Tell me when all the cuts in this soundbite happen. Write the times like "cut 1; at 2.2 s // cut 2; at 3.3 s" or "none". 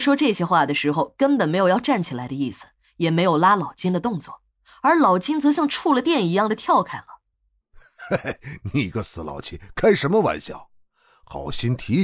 none

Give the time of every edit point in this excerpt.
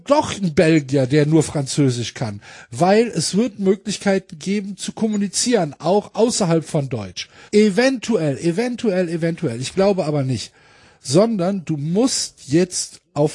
cut 1; at 7.5 s

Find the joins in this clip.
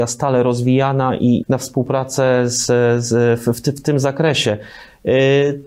cut 1; at 1.4 s

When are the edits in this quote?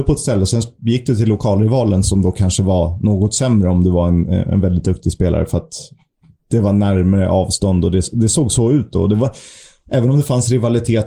none

